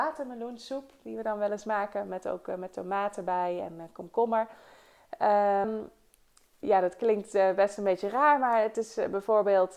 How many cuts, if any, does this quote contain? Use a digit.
1